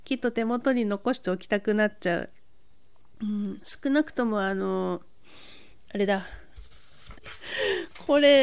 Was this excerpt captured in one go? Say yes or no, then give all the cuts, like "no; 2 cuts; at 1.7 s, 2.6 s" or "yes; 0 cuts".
no; 1 cut; at 7.2 s